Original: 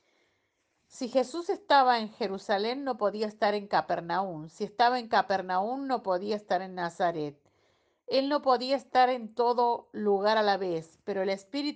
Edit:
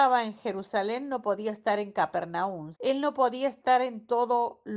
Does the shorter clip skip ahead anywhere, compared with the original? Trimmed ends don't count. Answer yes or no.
yes